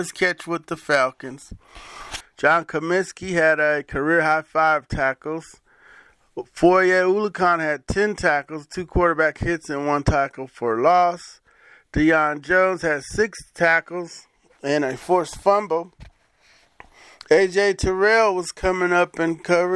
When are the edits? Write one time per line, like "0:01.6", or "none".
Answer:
0:02.2